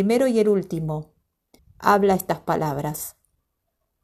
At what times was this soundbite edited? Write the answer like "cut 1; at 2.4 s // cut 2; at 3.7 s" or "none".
cut 1; at 1.6 s